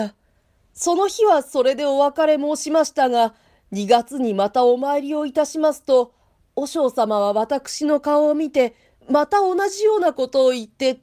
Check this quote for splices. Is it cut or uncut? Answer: uncut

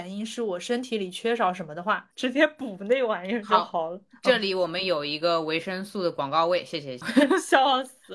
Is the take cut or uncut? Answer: uncut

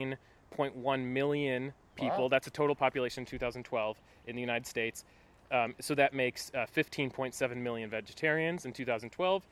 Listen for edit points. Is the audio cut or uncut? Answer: uncut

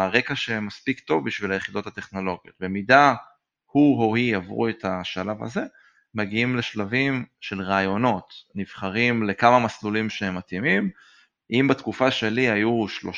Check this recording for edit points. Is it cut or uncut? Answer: uncut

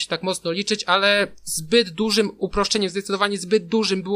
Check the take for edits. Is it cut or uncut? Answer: uncut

